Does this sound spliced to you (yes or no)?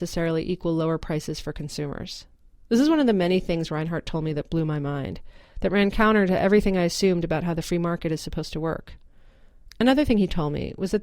no